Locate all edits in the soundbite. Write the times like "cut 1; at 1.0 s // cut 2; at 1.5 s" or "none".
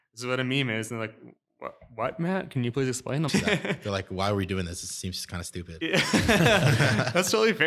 cut 1; at 3.3 s